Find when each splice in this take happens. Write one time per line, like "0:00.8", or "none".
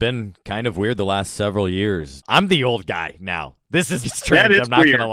0:02.2
0:04.0